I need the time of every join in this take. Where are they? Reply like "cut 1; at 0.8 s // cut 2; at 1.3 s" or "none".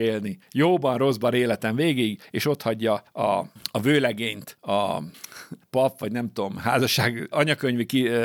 cut 1; at 7.3 s